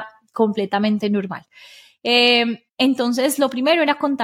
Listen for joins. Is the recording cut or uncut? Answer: uncut